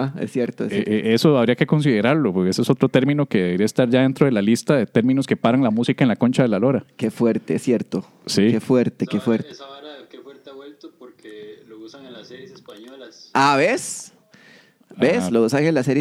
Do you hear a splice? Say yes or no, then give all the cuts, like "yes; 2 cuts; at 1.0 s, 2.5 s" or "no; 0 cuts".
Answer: no; 0 cuts